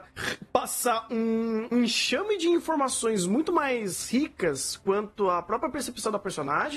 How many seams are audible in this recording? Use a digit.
1